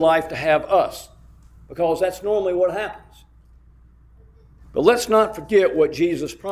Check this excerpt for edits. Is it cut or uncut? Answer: cut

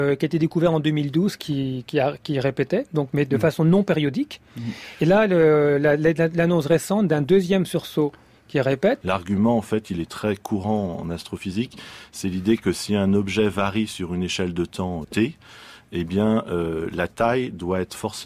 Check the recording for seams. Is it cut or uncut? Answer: cut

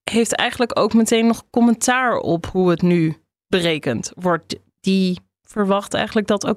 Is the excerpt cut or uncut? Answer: uncut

